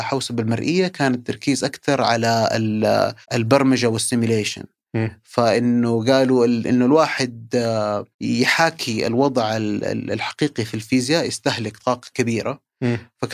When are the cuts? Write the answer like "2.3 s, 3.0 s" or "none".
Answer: 3.2 s, 8.1 s